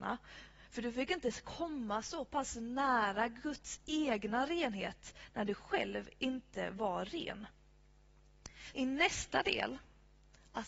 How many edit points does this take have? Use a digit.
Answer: 1